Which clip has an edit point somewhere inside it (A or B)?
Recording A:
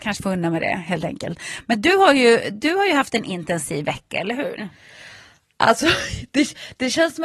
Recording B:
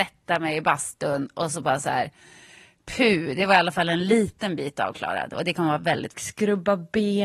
B